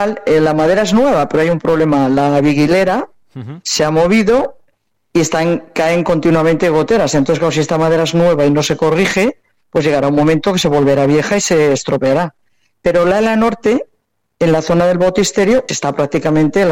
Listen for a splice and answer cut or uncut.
cut